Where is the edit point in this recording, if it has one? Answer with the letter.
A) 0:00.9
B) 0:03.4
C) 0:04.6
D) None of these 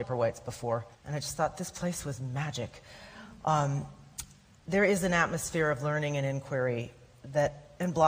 A